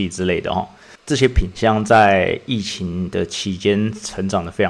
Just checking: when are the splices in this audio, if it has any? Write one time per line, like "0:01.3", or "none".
0:01.0

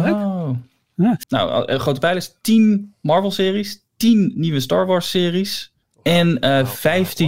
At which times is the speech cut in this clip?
0:01.2

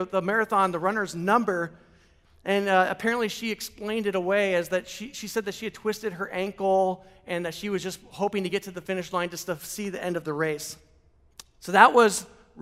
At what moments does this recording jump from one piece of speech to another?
none

